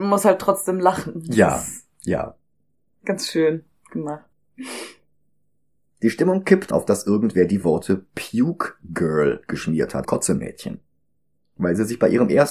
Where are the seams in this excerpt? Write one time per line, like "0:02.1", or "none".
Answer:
0:04.3
0:06.7
0:10.0